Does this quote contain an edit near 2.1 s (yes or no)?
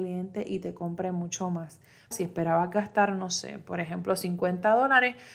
yes